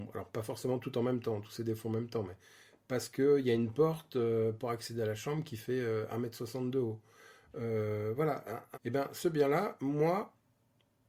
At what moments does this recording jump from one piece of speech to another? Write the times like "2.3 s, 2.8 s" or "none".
8.7 s